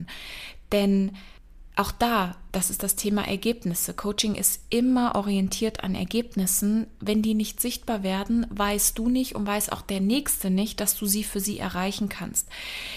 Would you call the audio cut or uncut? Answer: uncut